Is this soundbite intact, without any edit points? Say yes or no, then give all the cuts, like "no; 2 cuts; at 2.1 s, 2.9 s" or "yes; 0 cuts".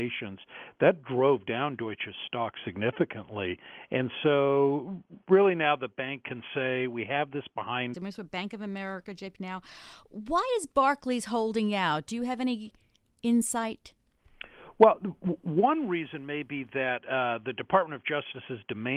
no; 2 cuts; at 7.9 s, 9.4 s